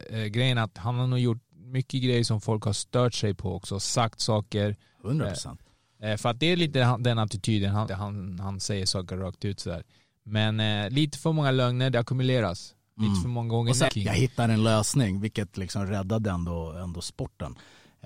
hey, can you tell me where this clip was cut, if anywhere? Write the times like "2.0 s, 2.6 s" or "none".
7.9 s, 13.9 s